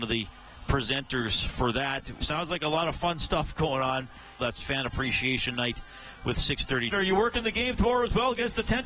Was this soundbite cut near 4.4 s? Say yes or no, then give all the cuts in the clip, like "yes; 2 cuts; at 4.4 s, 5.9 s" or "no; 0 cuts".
yes; 3 cuts; at 2.2 s, 4.4 s, 6.9 s